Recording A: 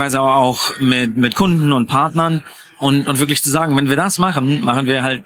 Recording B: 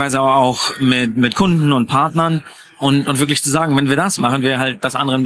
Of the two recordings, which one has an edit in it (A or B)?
B